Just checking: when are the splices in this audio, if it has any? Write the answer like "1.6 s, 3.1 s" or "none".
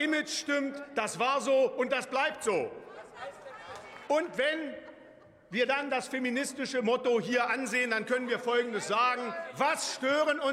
4.1 s